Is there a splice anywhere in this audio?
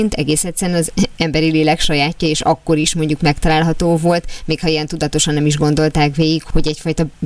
no; 0 cuts

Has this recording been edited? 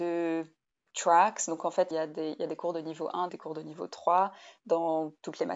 yes; 2 cuts; at 1.9 s, 3.3 s

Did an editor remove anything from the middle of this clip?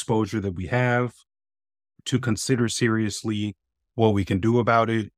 no; 0 cuts

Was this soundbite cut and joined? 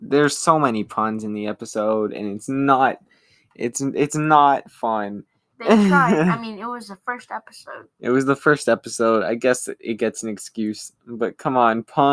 no; 0 cuts

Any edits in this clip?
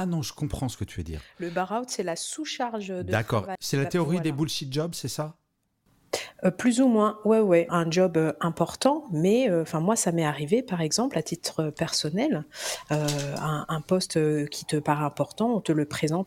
yes; 2 cuts; at 3.5 s, 7.7 s

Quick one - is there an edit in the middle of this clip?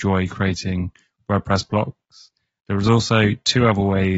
yes; 1 cut; at 2.6 s

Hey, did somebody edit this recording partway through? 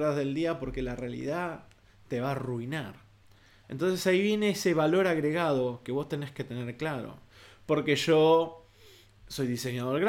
yes; 1 cut; at 3.6 s

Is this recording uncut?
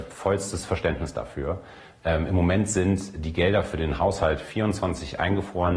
yes; 0 cuts

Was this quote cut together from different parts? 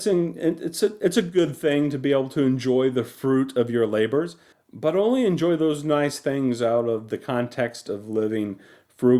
yes; 1 cut; at 4.5 s

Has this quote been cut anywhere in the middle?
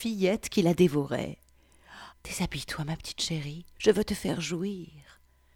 yes; 2 cuts; at 2.1 s, 3.8 s

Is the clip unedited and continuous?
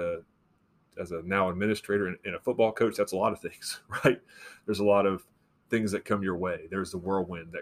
yes; 0 cuts

